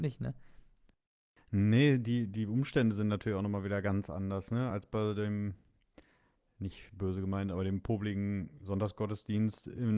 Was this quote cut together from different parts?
no; 0 cuts

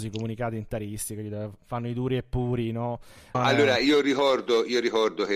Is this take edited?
yes; 1 cut; at 3.3 s

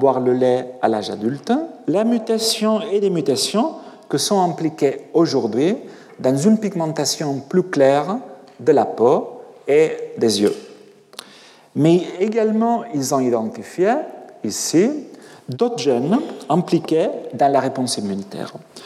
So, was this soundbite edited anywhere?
yes; 1 cut; at 1.8 s

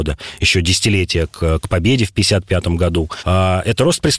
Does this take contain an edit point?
no; 0 cuts

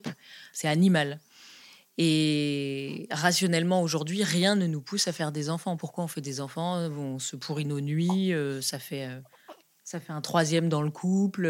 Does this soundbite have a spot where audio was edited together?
no; 0 cuts

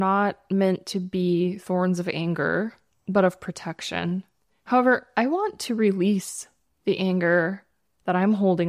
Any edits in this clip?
no; 0 cuts

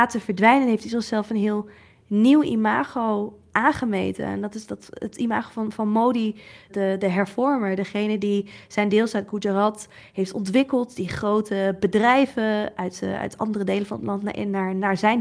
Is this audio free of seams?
yes; 0 cuts

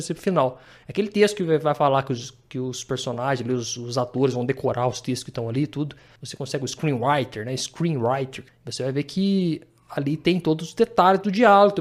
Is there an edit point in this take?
no; 0 cuts

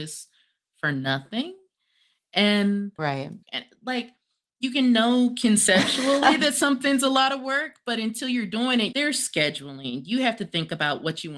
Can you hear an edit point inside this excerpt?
yes; 2 cuts; at 3.4 s, 8.9 s

